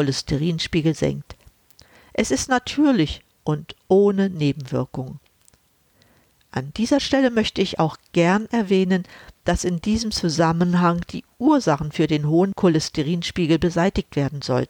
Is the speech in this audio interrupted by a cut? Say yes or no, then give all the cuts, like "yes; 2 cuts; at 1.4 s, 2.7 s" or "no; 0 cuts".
no; 0 cuts